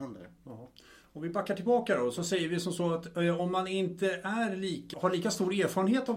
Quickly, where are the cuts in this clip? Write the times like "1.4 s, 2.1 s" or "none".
4.9 s

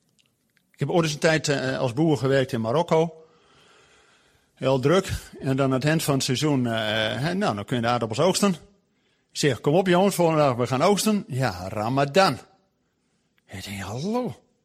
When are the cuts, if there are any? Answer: none

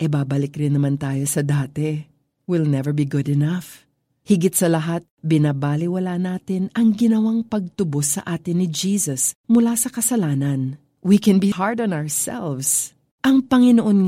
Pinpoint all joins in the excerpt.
11.5 s

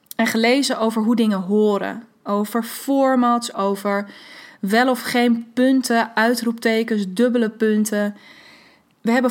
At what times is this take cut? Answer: 3.5 s

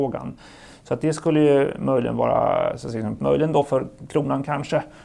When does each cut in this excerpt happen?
3.2 s

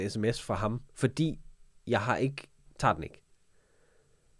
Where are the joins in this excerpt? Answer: 2.6 s

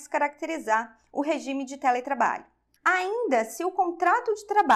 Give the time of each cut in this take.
2.8 s

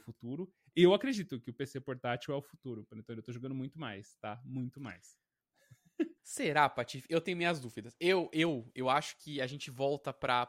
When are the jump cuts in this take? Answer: 6.2 s

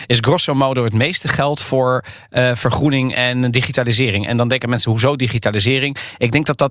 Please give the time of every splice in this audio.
none

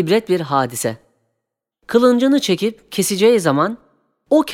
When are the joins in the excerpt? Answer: 1.7 s

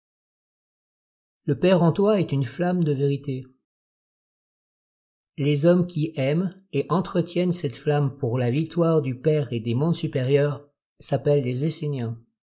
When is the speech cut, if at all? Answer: none

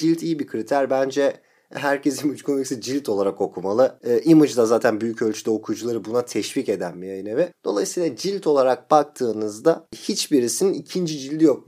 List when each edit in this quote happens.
none

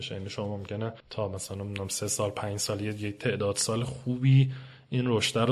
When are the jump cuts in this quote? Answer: 1.0 s

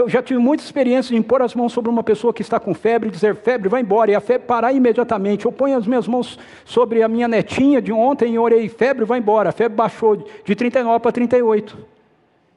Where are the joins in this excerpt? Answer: none

